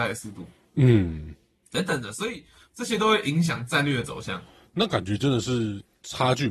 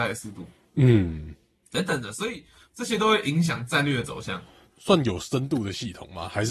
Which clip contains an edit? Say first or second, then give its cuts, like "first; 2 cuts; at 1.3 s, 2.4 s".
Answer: second; 1 cut; at 4.7 s